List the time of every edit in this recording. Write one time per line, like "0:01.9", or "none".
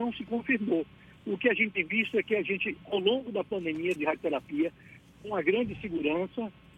0:04.0